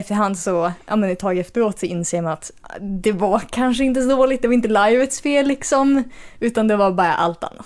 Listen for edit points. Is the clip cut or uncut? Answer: uncut